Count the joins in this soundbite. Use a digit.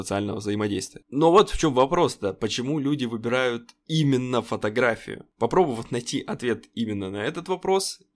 0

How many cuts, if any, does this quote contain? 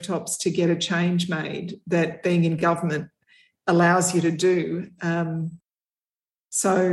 0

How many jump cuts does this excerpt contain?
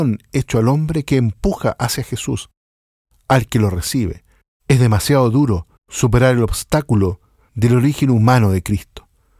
2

